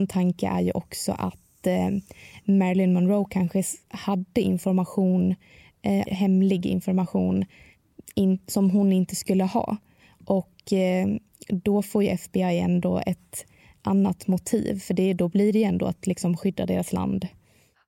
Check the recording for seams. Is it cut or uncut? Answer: cut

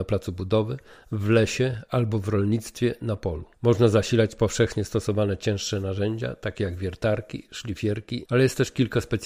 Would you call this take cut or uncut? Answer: cut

